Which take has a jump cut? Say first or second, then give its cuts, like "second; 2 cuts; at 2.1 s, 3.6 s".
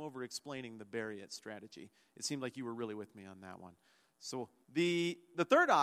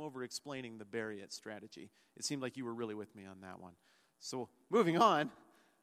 first; 1 cut; at 4.6 s